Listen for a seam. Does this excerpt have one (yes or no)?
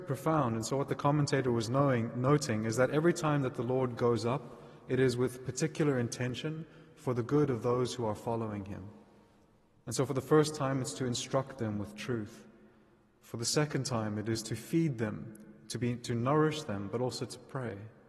no